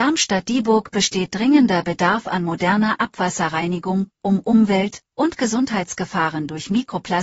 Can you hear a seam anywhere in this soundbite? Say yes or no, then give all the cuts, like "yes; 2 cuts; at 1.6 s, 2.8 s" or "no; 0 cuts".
no; 0 cuts